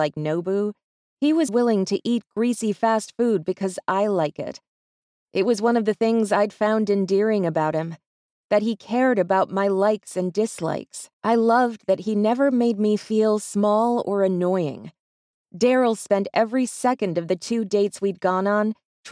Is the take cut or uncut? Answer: cut